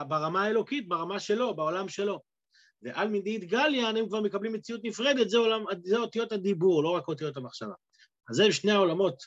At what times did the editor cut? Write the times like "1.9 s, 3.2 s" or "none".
8.2 s